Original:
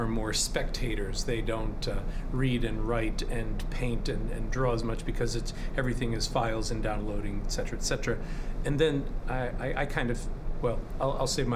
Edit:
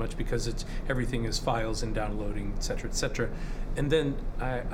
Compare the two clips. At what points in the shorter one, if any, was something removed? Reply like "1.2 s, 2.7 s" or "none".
none